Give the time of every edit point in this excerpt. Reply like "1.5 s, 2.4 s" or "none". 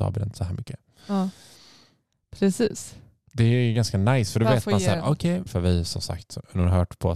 5.5 s

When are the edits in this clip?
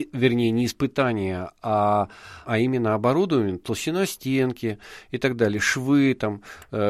2.4 s

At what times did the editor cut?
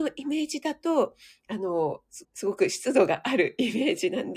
2.2 s

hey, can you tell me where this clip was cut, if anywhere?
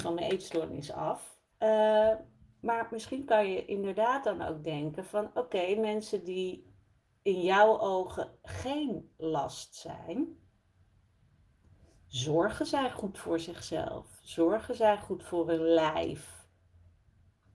1.5 s

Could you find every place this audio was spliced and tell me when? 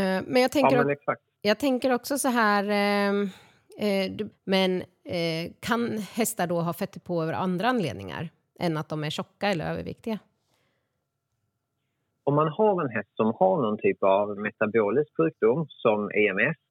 4.3 s, 14.4 s

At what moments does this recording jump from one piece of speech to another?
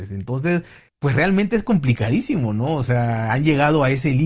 none

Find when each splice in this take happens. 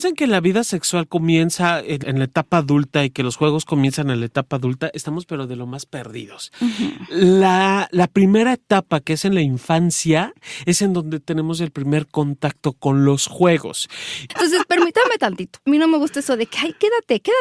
2.0 s, 14.3 s

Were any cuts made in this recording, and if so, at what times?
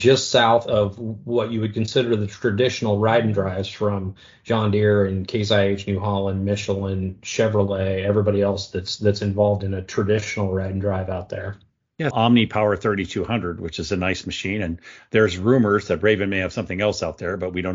12.1 s

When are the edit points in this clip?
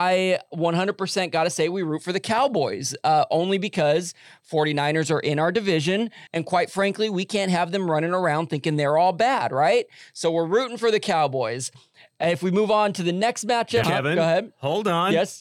6.3 s, 13.8 s

